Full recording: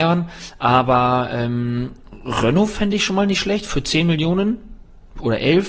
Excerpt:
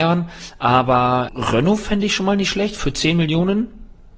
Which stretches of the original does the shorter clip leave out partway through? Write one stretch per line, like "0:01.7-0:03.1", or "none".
0:01.3-0:02.2